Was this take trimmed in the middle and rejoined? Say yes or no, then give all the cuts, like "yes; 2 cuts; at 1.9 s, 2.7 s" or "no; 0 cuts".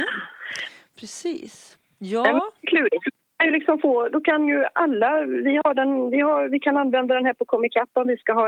no; 0 cuts